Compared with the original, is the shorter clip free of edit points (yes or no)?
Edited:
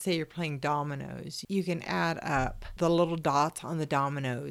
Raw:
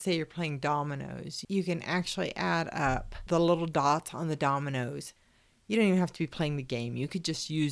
no